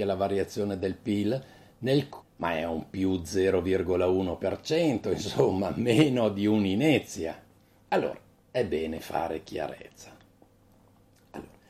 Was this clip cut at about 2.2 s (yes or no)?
yes